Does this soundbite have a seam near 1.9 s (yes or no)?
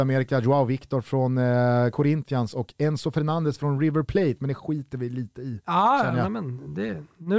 no